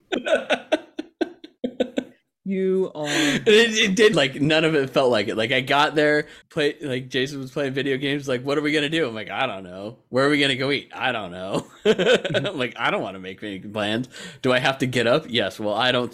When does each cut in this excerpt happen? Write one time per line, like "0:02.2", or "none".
0:04.1
0:06.4